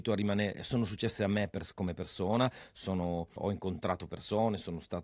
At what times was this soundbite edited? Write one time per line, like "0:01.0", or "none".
0:03.4